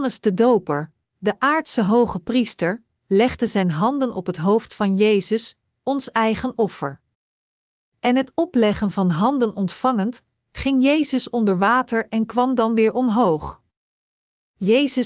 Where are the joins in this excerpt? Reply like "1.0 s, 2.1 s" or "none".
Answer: none